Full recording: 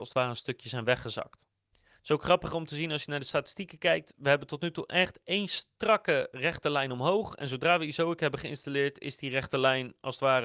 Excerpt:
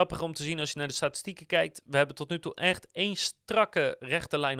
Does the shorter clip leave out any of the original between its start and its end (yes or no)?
no